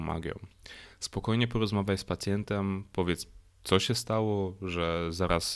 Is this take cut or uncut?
uncut